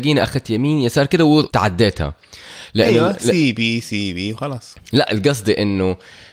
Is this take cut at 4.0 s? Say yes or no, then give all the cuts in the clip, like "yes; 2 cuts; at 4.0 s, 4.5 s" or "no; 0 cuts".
no; 1 cut; at 1.5 s